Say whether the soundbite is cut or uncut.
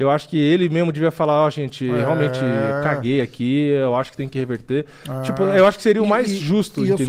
uncut